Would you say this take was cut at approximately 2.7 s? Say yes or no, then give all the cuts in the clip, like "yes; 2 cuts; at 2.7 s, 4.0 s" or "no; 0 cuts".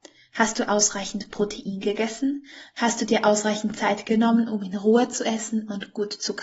yes; 1 cut; at 2.7 s